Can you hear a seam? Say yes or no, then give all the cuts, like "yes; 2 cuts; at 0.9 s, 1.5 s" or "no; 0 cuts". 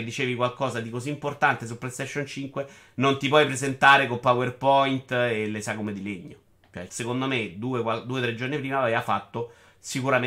yes; 1 cut; at 6.9 s